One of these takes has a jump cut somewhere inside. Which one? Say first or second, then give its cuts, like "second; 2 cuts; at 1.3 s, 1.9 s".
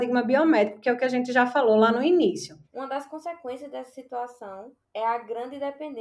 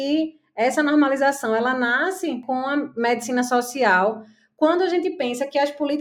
first; 1 cut; at 2.6 s